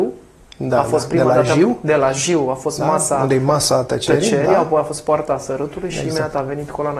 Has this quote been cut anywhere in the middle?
no; 0 cuts

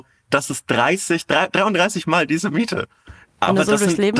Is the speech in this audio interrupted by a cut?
yes; 1 cut; at 3.2 s

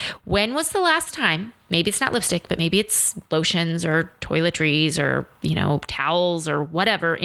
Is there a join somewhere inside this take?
no; 0 cuts

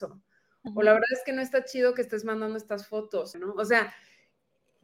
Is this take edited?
yes; 1 cut; at 3.3 s

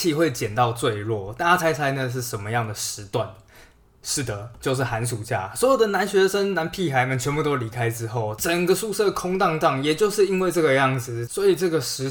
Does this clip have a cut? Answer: no; 0 cuts

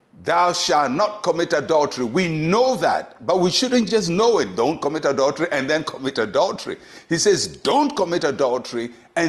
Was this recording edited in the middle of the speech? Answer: no; 0 cuts

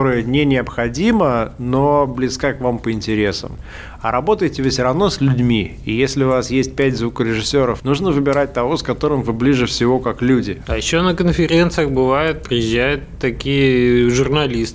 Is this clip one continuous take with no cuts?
no; 2 cuts; at 7.8 s, 10.6 s

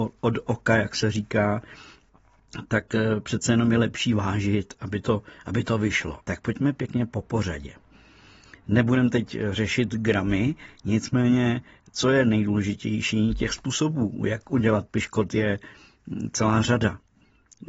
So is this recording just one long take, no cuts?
no; 1 cut; at 6.2 s

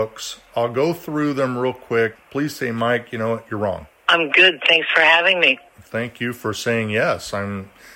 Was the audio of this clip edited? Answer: yes; 2 cuts; at 2.2 s, 3.9 s

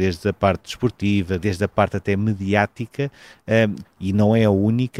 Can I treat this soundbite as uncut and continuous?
no; 2 cuts; at 1.4 s, 3.8 s

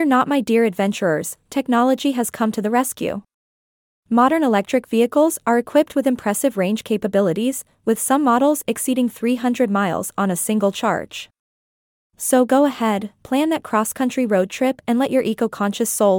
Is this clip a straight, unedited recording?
yes; 0 cuts

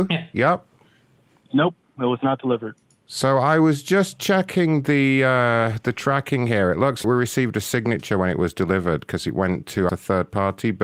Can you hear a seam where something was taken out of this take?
yes; 2 cuts; at 7.0 s, 9.9 s

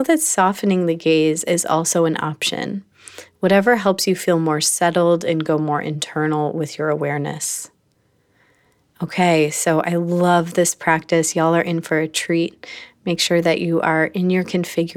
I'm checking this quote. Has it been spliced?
no; 0 cuts

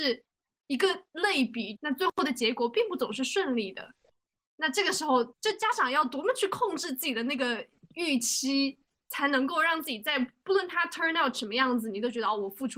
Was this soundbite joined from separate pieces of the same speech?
yes; 1 cut; at 1.8 s

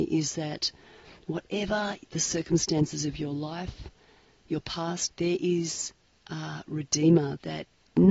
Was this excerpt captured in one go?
no; 1 cut; at 5.1 s

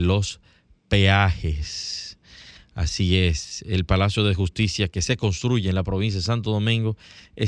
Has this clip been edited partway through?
no; 0 cuts

